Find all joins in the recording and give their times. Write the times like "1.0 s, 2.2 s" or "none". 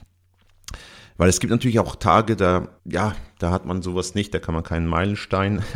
2.8 s